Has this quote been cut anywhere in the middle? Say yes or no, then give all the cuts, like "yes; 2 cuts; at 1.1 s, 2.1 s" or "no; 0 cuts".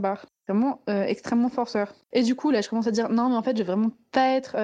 yes; 1 cut; at 2.0 s